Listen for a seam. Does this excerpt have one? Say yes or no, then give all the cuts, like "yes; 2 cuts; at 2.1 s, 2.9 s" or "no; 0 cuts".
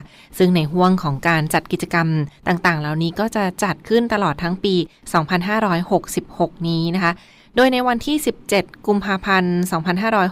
no; 0 cuts